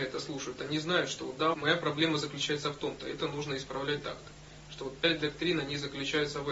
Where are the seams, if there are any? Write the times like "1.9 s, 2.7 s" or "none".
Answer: 1.5 s